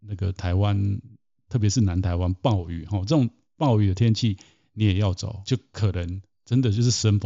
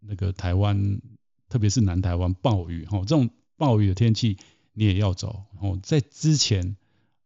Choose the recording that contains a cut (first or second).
first